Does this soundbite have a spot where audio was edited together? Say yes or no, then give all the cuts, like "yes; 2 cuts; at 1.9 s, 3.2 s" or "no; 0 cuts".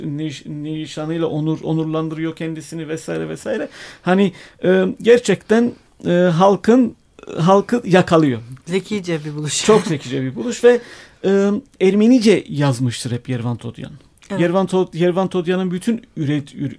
yes; 1 cut; at 11.8 s